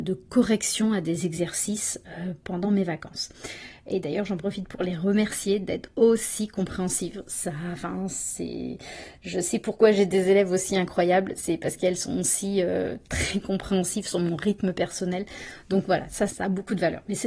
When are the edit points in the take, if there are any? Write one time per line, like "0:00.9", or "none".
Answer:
0:02.4
0:16.3